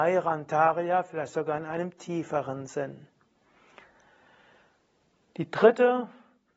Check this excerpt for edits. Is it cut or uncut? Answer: uncut